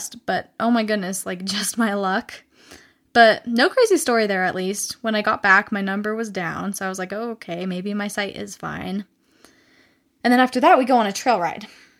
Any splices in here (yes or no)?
no